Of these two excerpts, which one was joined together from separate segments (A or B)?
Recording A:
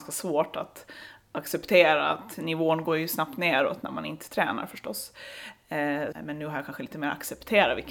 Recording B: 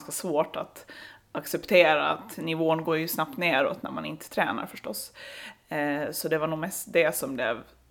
A